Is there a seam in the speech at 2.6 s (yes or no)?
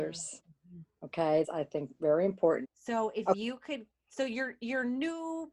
yes